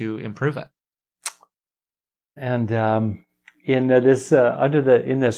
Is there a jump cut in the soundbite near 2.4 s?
yes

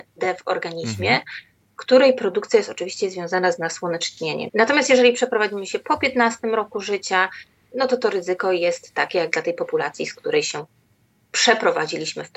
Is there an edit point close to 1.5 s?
no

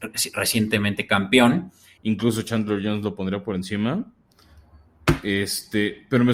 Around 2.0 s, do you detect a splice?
yes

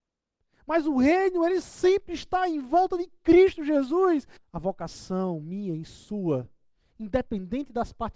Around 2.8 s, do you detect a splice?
no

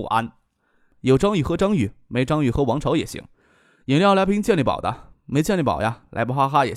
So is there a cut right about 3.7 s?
no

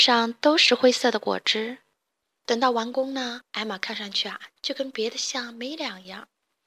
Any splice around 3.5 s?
yes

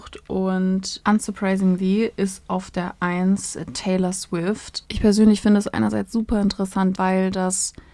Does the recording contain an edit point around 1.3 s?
no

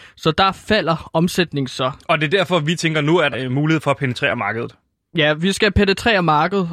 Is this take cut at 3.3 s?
yes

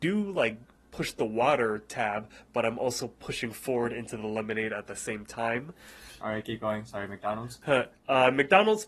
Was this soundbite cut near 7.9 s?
yes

